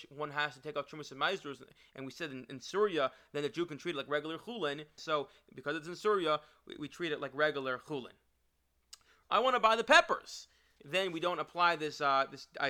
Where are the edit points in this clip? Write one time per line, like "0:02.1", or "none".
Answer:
0:05.0
0:09.2
0:10.8